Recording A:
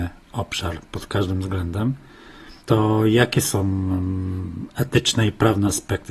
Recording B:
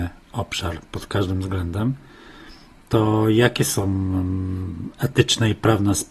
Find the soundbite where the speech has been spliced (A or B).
A